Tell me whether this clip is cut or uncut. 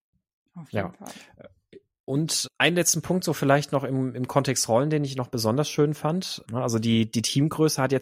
cut